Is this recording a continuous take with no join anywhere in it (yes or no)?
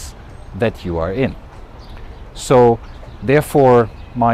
yes